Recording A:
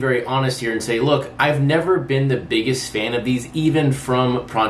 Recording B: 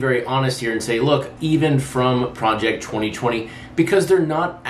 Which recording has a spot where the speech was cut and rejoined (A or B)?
B